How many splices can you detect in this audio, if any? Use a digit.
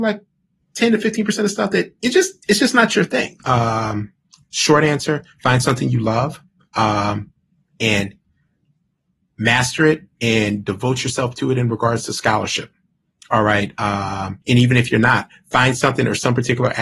2